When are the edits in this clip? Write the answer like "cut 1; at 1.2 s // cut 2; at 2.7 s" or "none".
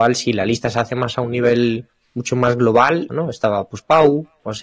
cut 1; at 3.1 s